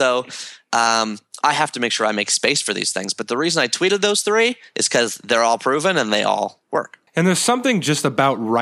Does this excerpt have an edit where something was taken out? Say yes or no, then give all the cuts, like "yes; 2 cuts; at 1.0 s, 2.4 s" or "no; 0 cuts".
yes; 1 cut; at 7.1 s